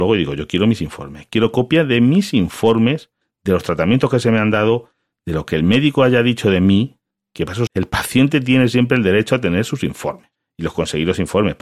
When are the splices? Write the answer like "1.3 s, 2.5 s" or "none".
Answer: 7.7 s

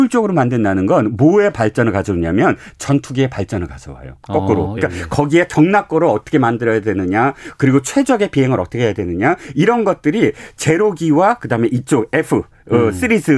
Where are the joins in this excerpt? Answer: 4.8 s

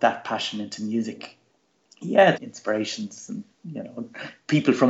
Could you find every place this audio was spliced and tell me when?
2.3 s, 3.5 s

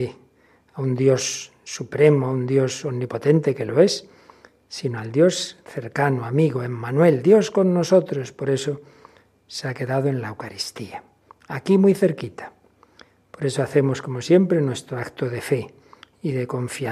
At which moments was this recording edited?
none

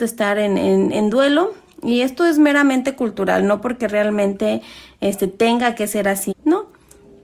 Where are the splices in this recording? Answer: 6.3 s

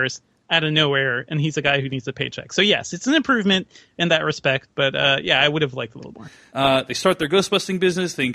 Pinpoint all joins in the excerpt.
6.5 s

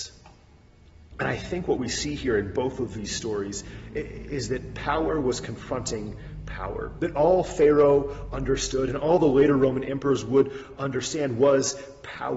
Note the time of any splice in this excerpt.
1.1 s

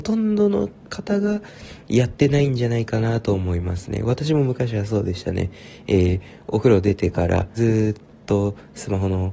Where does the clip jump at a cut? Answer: 7.6 s

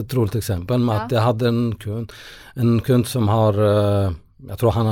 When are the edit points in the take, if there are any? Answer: none

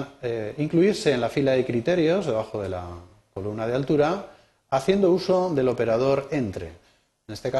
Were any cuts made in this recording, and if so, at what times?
none

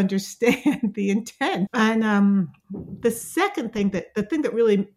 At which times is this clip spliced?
1.7 s

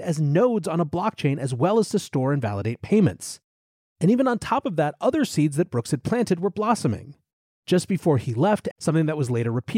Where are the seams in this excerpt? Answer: 3.8 s, 8.7 s

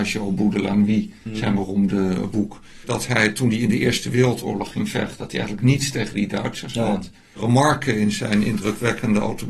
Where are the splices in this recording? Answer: none

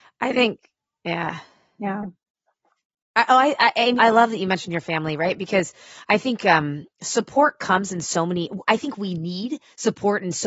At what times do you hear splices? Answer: 4.0 s

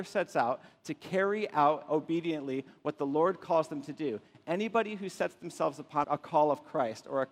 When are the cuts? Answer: 6.0 s

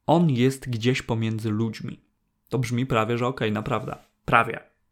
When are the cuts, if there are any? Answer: none

